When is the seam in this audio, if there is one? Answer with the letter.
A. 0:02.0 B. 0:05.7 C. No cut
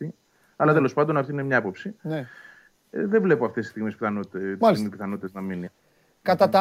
B